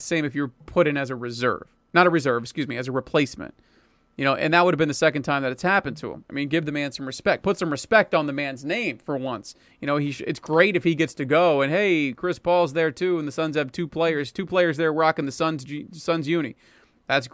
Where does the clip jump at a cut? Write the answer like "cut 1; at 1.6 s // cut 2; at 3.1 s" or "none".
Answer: none